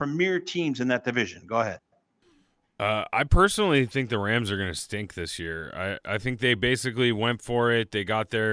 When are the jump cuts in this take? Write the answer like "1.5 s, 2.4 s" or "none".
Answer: none